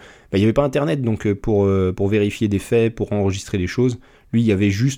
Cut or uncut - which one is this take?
uncut